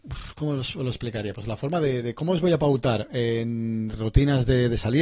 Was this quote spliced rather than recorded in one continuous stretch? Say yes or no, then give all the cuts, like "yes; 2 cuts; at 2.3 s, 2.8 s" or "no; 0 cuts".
no; 0 cuts